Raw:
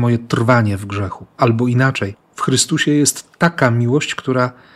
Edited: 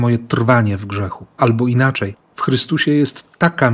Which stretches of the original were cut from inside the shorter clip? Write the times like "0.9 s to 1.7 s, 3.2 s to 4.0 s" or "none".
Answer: none